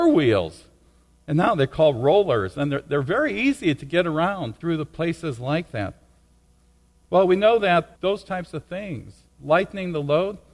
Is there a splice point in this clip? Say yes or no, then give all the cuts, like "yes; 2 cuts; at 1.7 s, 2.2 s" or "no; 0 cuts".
no; 0 cuts